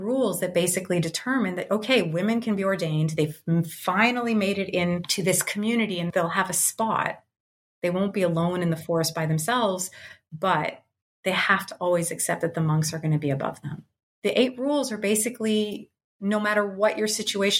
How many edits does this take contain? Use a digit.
1